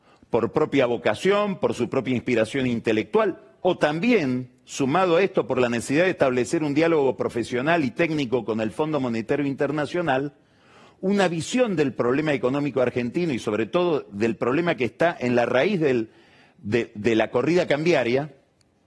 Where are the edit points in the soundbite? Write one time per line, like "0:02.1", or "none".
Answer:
none